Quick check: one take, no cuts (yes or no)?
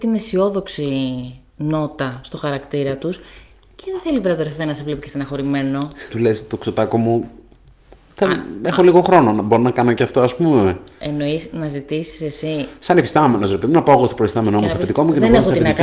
no